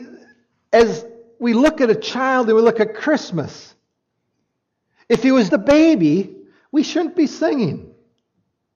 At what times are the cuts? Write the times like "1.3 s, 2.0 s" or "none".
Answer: 5.5 s